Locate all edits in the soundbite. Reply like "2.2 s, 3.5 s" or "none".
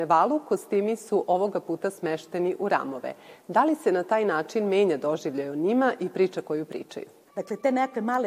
7.3 s